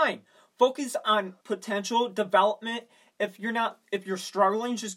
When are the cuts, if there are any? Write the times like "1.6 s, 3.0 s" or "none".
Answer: 1.4 s